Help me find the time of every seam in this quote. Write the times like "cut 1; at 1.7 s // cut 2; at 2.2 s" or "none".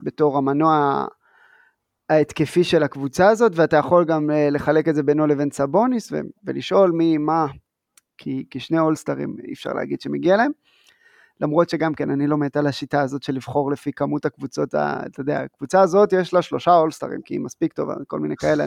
none

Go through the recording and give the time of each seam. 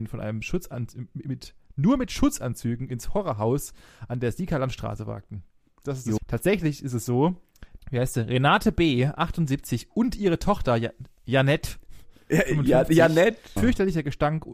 cut 1; at 6.2 s // cut 2; at 7.8 s // cut 3; at 13.6 s

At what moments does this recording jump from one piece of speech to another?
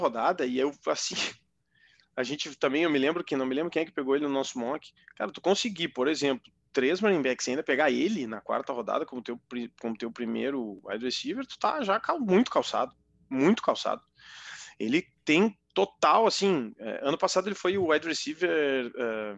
none

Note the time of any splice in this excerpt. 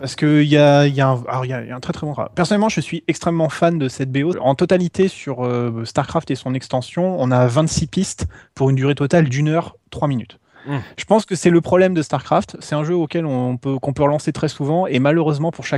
cut 1; at 4.3 s

